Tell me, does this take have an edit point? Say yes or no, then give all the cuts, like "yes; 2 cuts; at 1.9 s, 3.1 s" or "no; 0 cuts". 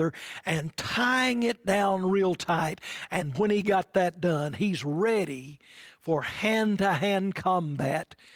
yes; 1 cut; at 3.3 s